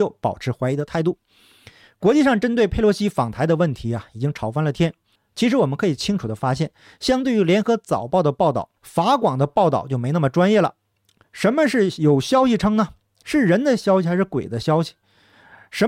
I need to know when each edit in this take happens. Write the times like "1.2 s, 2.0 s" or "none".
5.2 s, 8.8 s